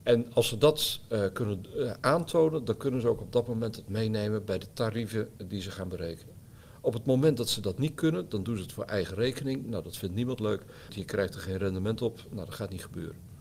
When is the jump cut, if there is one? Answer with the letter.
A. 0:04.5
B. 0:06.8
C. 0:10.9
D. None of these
C